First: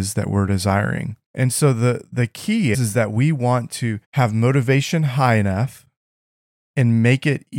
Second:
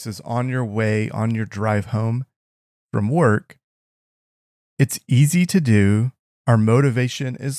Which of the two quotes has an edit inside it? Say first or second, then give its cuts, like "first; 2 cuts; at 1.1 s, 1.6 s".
first; 3 cuts; at 1.2 s, 2.7 s, 4.0 s